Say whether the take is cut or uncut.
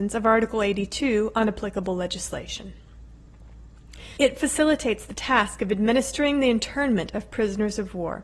cut